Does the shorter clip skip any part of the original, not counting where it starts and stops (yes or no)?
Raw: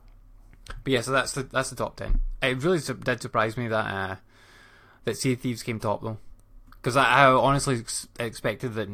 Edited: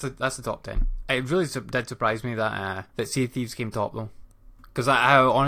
yes